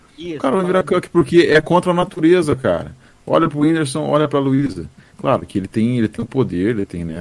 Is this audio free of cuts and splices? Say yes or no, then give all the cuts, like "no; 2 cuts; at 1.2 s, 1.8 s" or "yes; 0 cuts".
yes; 0 cuts